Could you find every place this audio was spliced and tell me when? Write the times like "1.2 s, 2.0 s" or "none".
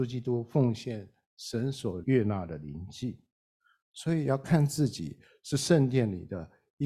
2.0 s